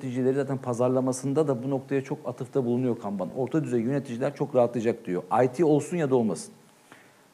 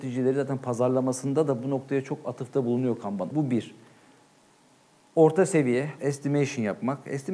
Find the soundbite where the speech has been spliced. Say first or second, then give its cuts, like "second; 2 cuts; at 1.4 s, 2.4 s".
second; 2 cuts; at 3.3 s, 6.0 s